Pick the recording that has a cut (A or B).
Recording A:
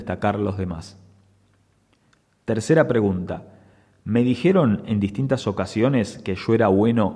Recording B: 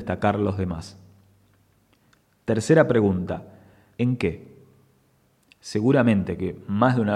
B